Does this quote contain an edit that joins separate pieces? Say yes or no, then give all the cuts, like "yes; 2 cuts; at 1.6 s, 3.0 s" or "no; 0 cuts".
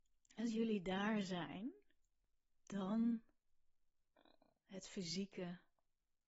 no; 0 cuts